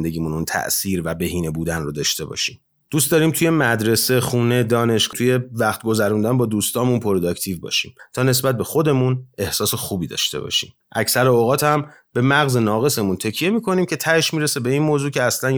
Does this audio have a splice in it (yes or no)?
yes